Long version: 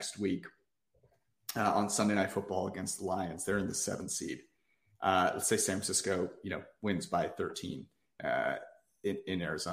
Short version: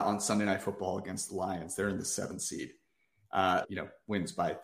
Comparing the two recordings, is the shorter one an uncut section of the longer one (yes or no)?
no